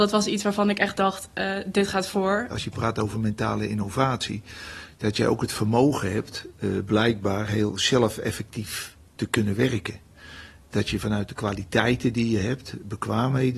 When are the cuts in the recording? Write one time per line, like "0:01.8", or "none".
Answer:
0:02.5